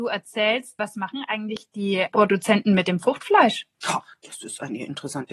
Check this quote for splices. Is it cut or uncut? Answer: cut